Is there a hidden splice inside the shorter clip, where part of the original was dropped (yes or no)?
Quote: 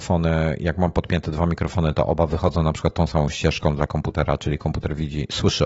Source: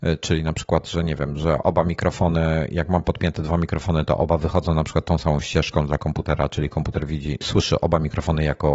no